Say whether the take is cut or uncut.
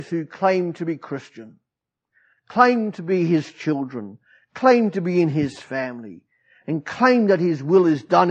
uncut